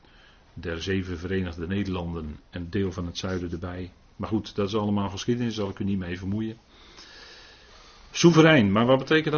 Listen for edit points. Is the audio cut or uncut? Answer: cut